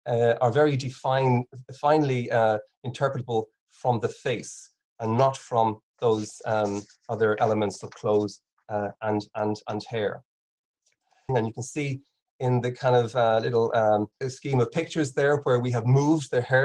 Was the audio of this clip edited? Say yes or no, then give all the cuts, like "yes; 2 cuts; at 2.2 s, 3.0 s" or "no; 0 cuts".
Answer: yes; 2 cuts; at 11.3 s, 14.2 s